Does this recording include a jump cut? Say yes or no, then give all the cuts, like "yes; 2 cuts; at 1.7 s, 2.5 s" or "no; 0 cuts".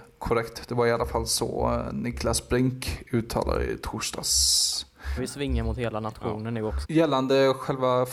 yes; 2 cuts; at 5.2 s, 6.8 s